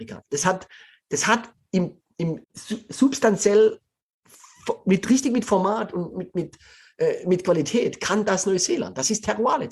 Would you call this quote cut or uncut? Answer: cut